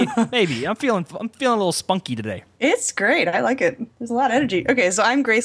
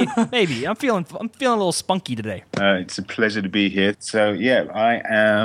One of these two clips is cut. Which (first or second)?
second